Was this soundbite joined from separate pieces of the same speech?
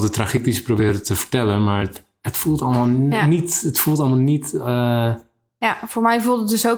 no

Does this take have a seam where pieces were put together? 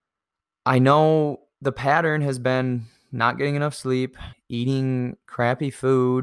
yes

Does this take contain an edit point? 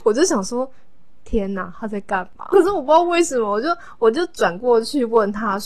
yes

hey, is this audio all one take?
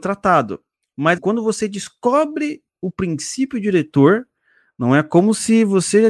no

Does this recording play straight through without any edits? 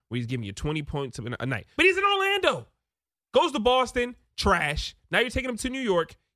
no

